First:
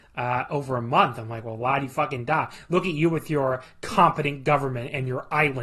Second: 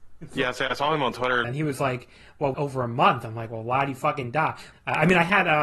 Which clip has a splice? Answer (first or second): second